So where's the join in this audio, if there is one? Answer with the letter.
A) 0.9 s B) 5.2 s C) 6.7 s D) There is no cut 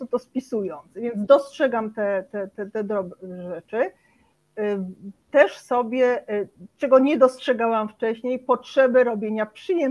D